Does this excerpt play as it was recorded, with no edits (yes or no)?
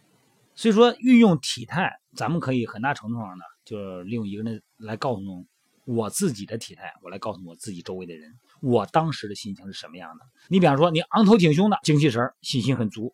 no